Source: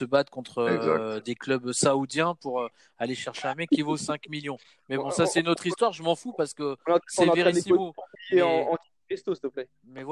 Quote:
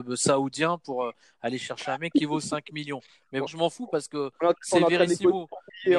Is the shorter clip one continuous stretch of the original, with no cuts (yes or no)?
no